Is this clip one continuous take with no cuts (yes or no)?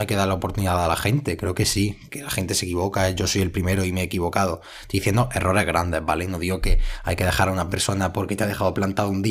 yes